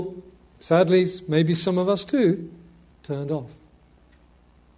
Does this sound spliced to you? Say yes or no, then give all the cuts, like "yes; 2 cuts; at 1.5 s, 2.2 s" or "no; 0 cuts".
yes; 1 cut; at 2.9 s